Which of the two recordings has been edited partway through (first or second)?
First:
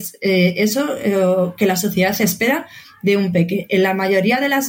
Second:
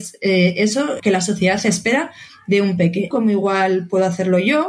second